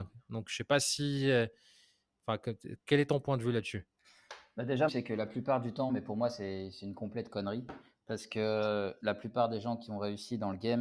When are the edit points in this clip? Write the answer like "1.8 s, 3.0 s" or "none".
4.9 s, 5.9 s, 9.0 s